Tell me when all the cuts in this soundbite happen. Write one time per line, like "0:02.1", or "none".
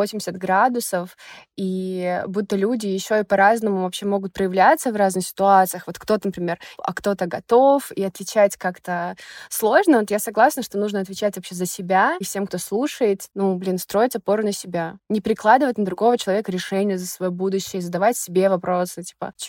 0:06.8
0:12.2